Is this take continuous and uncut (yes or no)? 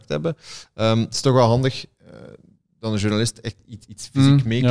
yes